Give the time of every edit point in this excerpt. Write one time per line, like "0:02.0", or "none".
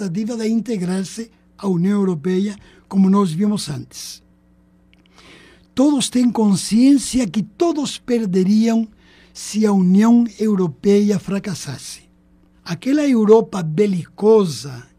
0:12.5